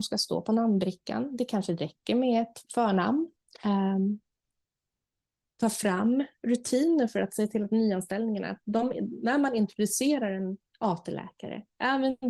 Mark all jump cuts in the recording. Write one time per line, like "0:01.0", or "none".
none